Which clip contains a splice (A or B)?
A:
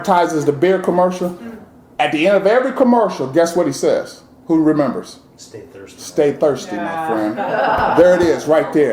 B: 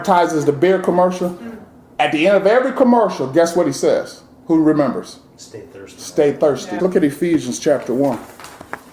B